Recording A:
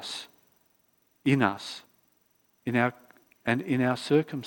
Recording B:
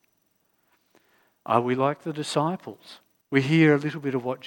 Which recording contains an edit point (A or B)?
B